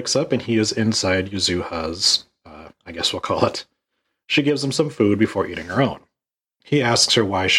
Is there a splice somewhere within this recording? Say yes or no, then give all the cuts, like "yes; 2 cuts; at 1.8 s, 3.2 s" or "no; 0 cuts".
yes; 1 cut; at 2.7 s